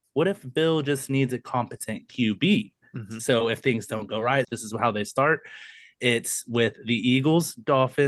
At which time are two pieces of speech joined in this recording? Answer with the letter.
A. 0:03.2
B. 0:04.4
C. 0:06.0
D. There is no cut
B